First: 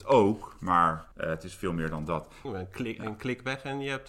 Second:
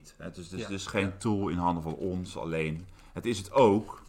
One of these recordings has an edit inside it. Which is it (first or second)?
first